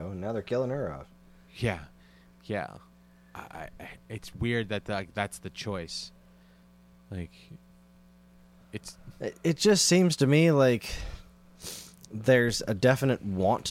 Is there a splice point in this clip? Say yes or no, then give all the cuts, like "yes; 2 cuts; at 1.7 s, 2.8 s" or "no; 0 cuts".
no; 0 cuts